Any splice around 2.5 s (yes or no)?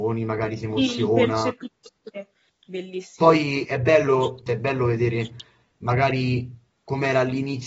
yes